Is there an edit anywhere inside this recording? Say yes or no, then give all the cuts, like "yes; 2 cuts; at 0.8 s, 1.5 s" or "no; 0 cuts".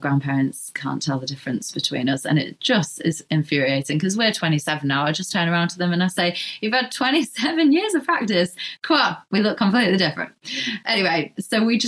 no; 0 cuts